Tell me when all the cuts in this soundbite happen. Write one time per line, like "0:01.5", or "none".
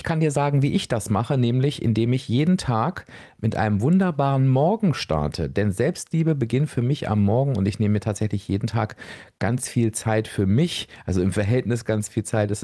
none